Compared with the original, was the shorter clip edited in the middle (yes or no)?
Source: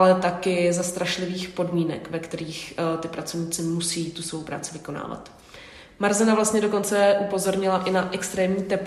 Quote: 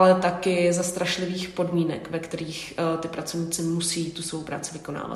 no